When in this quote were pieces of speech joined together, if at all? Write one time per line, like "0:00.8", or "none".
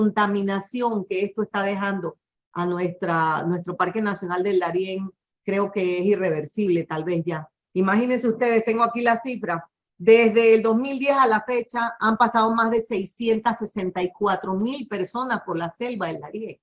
none